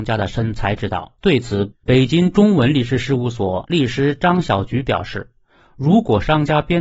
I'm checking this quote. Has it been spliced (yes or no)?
yes